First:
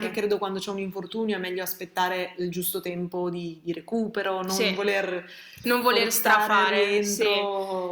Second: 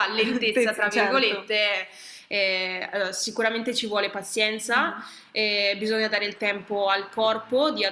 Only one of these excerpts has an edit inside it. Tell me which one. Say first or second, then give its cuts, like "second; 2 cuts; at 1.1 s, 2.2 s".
first; 1 cut; at 5.6 s